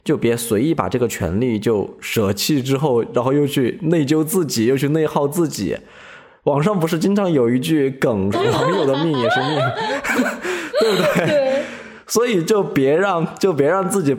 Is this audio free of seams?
no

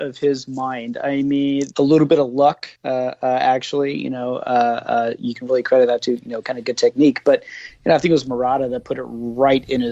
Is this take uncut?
no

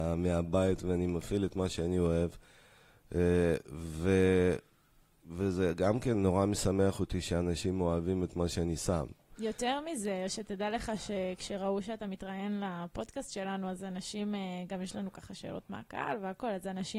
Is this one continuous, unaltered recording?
yes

